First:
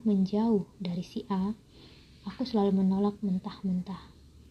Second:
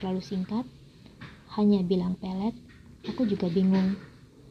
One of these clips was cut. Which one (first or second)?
second